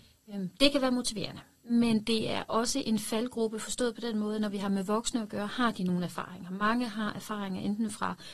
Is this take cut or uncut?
uncut